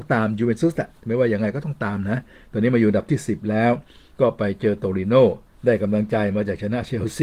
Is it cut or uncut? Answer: uncut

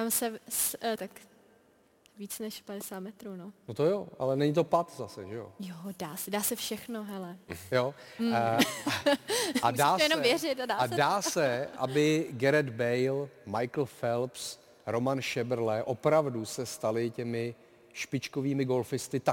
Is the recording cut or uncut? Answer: cut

